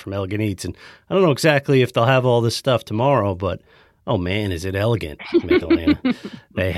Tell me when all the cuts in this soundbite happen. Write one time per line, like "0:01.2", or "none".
none